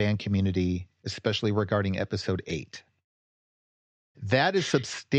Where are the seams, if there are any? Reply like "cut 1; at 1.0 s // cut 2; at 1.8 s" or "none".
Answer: cut 1; at 4.1 s